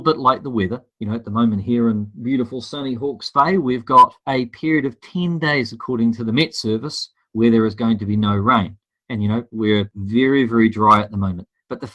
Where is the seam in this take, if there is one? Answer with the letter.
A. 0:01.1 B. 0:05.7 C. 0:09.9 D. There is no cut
D